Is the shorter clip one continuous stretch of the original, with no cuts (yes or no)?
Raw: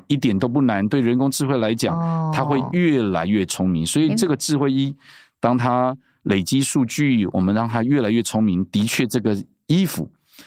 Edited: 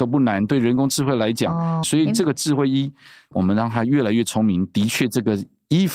no